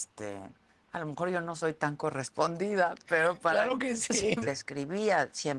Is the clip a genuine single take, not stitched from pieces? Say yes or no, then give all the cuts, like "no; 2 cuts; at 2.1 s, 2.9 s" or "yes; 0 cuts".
no; 1 cut; at 4.4 s